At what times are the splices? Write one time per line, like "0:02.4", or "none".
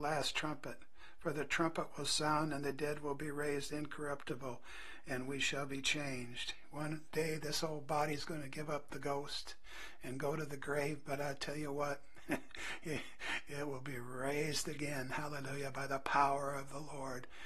none